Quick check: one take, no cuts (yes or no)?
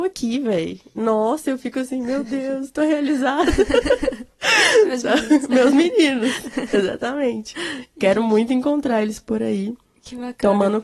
yes